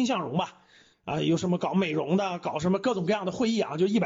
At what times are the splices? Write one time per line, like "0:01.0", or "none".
0:00.9